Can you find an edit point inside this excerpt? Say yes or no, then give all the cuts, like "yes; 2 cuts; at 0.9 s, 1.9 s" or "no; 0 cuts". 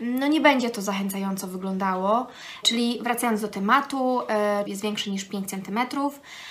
yes; 2 cuts; at 2.6 s, 4.7 s